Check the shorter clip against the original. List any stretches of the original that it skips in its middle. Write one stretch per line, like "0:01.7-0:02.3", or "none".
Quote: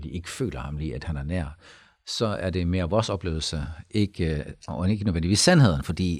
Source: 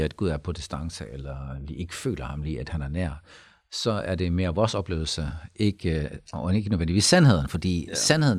none